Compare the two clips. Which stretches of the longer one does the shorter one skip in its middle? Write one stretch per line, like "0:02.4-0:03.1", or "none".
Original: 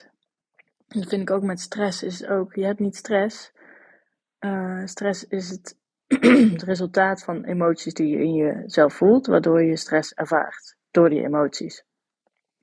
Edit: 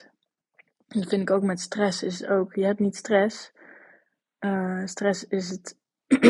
none